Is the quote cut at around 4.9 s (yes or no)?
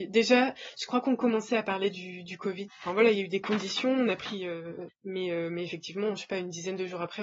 yes